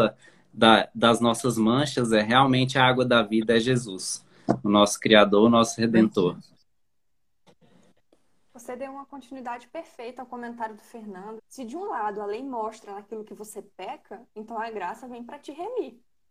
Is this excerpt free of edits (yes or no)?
no